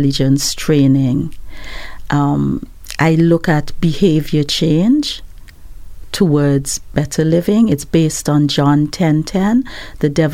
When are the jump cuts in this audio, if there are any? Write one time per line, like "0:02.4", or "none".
none